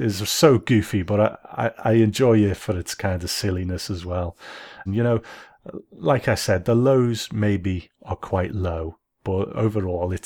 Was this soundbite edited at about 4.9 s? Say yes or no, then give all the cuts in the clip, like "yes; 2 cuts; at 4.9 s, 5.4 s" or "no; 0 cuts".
yes; 1 cut; at 4.9 s